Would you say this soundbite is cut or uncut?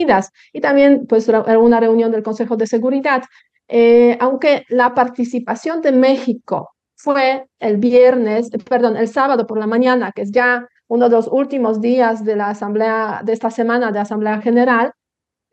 uncut